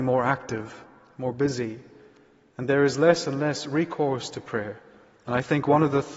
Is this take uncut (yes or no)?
yes